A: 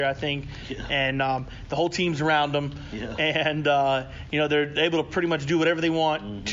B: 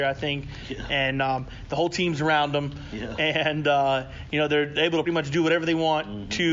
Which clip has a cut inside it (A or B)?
B